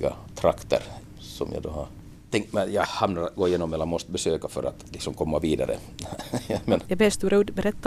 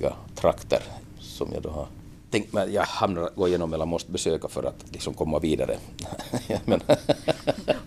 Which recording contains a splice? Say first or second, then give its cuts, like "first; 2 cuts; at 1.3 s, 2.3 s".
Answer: first; 1 cut; at 6.8 s